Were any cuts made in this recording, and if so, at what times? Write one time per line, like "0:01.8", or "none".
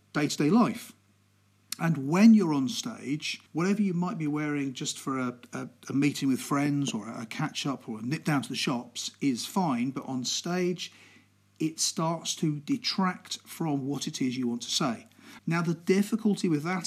0:03.5
0:15.4